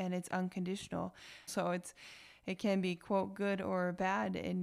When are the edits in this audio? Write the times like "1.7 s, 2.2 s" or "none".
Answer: 1.5 s